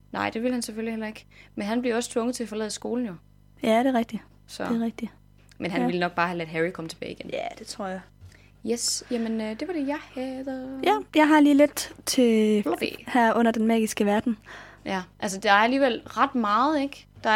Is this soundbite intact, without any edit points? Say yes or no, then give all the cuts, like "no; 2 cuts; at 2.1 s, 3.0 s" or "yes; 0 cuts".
no; 2 cuts; at 12.6 s, 14.8 s